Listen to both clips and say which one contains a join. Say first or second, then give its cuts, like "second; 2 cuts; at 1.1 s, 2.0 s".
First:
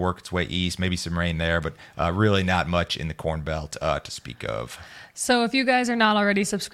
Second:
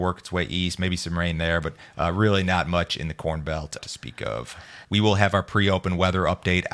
second; 2 cuts; at 3.8 s, 4.8 s